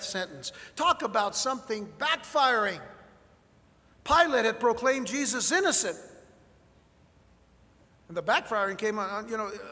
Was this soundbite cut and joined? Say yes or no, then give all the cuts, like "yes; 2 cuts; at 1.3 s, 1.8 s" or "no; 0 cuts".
no; 0 cuts